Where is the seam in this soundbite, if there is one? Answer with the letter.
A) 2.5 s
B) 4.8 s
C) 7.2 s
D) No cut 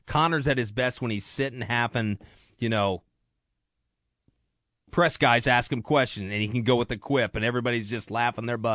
D